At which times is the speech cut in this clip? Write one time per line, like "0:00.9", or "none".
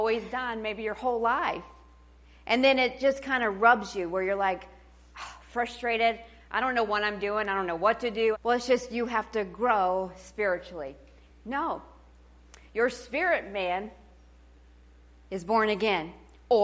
0:08.3
0:11.3

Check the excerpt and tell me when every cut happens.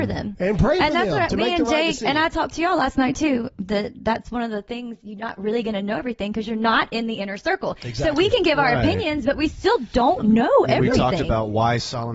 none

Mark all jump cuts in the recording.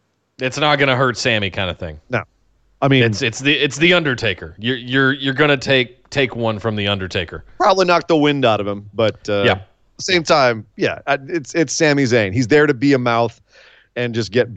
none

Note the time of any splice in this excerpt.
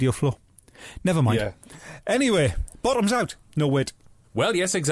0:03.4

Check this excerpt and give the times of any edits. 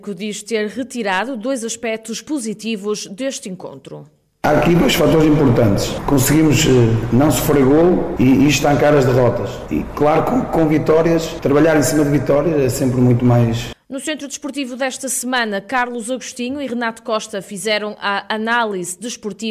0:13.7

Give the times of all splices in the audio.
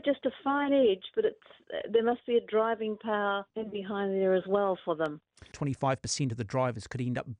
0:03.5
0:05.5

